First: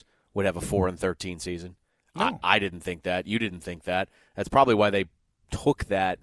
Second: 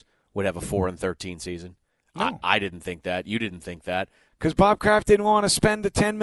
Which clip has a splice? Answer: second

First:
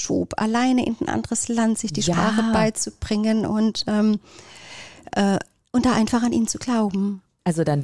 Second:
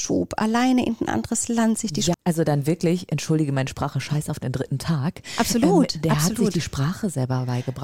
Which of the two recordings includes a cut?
second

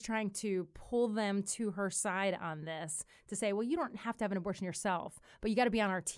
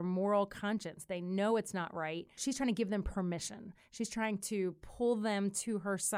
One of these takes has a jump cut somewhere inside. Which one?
second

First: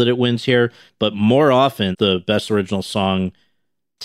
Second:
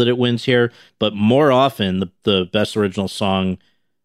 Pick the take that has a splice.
first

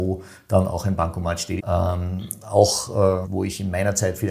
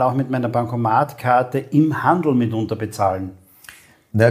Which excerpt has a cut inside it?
first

